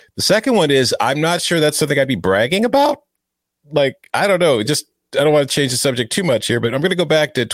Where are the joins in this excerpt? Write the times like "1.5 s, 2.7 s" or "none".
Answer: none